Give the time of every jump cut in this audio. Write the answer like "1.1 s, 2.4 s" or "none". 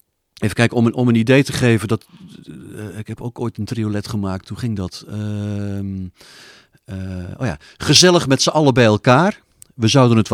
none